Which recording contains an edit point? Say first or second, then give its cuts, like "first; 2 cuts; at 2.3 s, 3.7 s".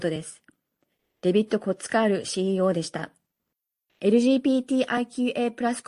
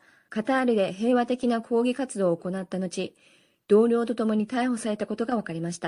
first; 1 cut; at 3.9 s